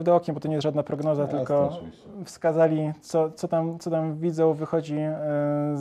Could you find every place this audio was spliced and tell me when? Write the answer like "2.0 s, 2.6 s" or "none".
none